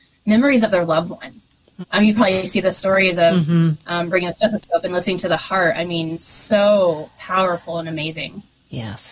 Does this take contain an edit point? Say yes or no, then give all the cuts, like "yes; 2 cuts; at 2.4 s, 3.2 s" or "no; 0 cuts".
yes; 1 cut; at 1.8 s